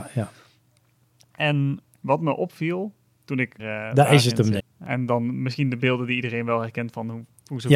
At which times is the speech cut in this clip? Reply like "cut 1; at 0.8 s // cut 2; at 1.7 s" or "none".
cut 1; at 3.6 s // cut 2; at 4.6 s